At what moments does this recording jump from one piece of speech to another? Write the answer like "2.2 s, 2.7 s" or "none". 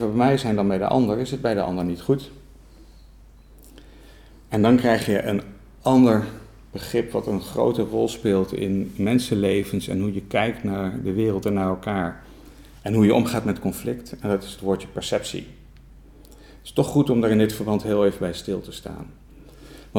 none